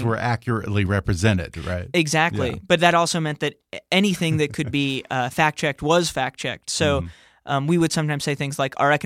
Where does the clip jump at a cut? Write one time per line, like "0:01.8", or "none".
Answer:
none